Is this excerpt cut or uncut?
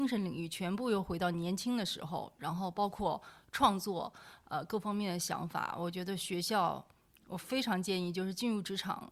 uncut